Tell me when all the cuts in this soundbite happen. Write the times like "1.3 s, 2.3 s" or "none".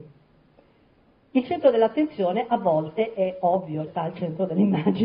3.9 s